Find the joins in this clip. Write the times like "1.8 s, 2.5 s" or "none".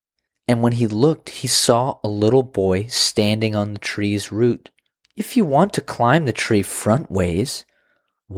5.0 s